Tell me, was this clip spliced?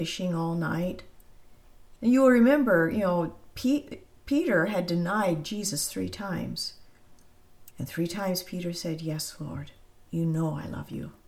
yes; 2 cuts; at 2.0 s, 7.7 s

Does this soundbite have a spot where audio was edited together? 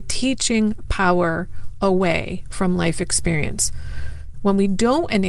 yes; 1 cut; at 4.3 s

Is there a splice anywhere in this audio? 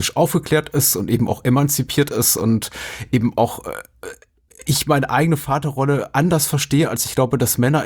no; 0 cuts

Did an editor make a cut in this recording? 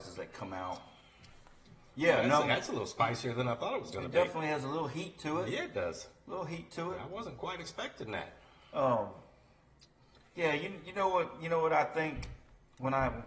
no; 0 cuts

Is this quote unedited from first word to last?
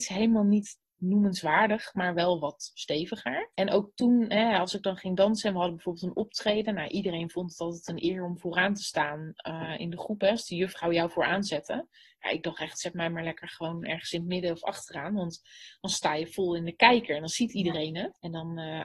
yes; 0 cuts

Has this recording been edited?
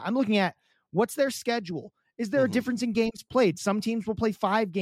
no; 0 cuts

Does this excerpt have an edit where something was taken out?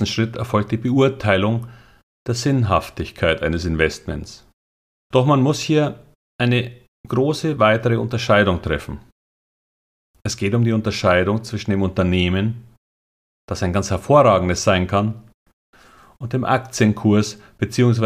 yes; 1 cut; at 5.1 s

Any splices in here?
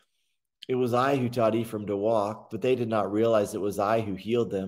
yes; 1 cut; at 2.5 s

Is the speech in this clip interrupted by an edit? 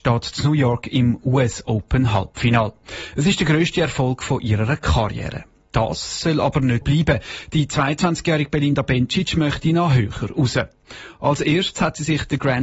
yes; 1 cut; at 6.8 s

